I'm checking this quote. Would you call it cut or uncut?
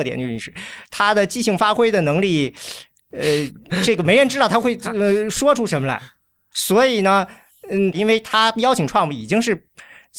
cut